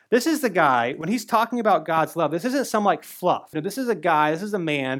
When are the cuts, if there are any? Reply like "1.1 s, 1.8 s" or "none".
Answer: 3.5 s